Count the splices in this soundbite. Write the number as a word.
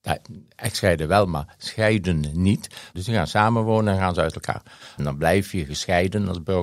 two